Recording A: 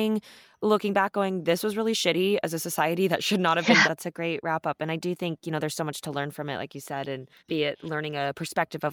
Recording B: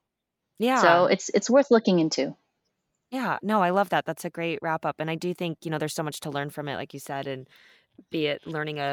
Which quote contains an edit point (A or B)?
A